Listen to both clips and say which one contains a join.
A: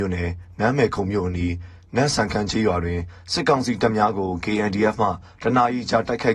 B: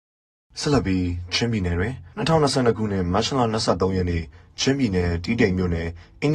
B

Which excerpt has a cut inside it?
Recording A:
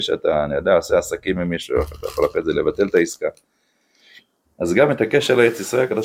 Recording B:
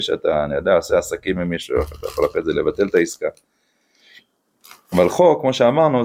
A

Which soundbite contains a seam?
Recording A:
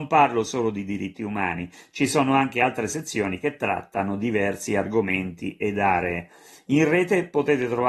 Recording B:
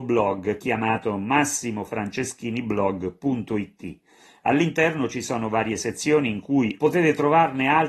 B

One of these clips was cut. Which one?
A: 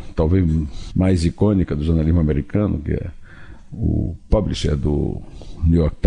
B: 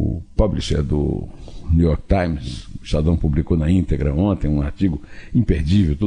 A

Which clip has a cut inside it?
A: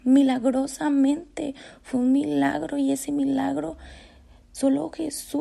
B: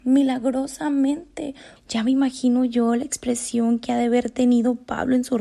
B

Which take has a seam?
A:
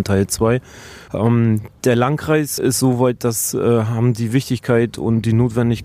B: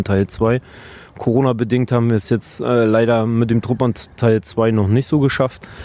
A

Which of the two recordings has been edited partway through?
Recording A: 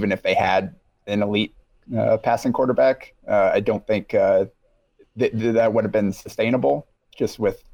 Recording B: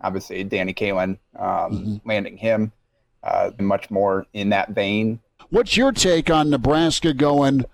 B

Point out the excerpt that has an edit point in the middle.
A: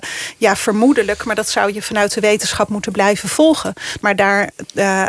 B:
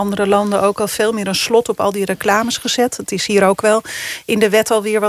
A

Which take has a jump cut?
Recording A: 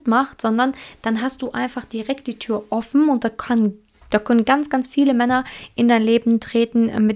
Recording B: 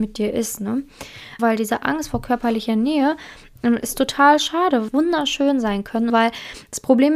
B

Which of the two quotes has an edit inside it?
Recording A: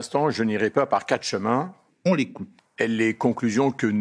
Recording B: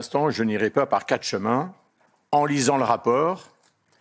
A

